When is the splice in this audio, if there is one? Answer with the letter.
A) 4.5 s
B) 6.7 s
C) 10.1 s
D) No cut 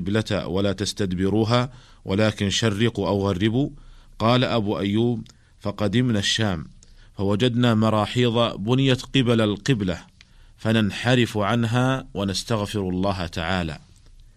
D